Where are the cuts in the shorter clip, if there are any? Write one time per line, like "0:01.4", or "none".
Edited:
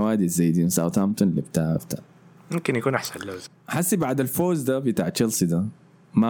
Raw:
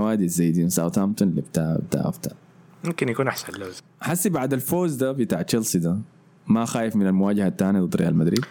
0:01.8